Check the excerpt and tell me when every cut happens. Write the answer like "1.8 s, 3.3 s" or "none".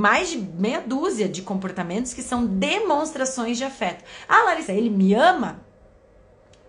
4.7 s